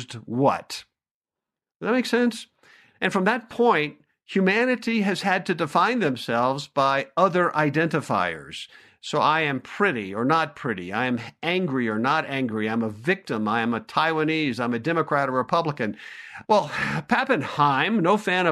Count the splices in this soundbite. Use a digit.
1